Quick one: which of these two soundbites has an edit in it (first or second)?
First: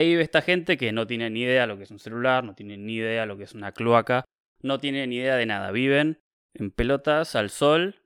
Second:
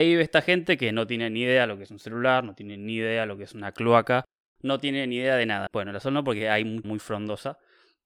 second